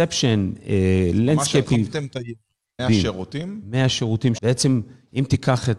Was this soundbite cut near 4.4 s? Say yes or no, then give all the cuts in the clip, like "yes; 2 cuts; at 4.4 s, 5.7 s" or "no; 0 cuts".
yes; 2 cuts; at 2.8 s, 4.4 s